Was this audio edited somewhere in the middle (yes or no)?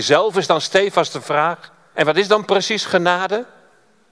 yes